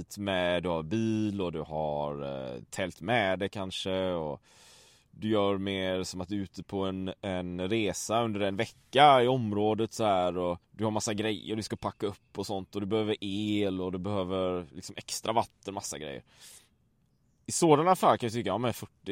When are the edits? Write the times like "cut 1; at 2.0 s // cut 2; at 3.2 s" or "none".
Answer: cut 1; at 10.6 s